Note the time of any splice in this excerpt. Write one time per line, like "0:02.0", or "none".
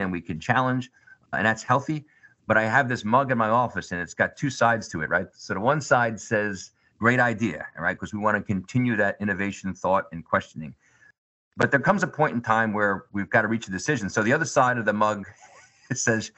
none

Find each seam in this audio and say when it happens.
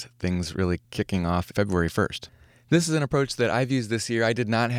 none

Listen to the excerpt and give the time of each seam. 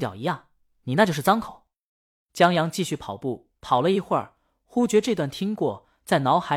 0:02.1

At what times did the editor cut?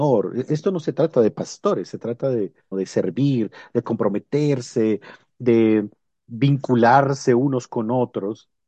0:02.7

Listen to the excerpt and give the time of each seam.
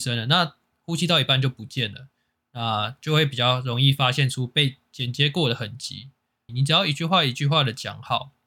0:06.5

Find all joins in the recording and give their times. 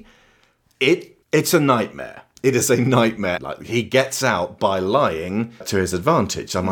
0:01.2
0:03.4
0:05.6

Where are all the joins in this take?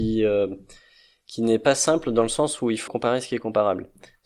0:02.9

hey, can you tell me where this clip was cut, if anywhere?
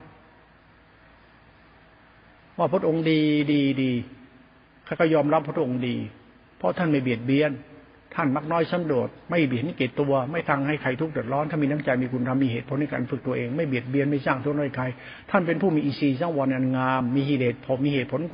none

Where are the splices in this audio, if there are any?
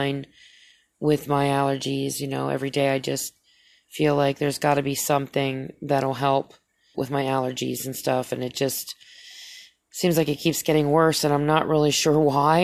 0:06.9

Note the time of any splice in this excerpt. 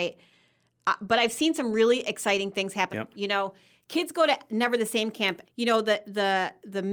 0:02.9
0:05.4

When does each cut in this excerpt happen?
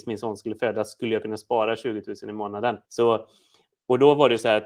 0:02.8

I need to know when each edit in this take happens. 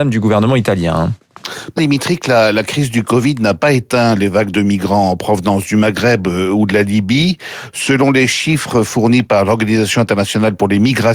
0:01.8

